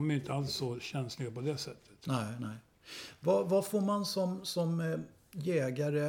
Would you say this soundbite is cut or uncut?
uncut